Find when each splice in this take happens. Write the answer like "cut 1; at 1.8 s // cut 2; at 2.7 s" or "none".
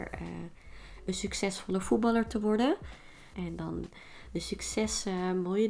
cut 1; at 3.3 s